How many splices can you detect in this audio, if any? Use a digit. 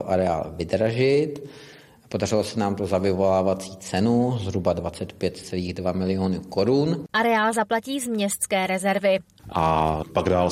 2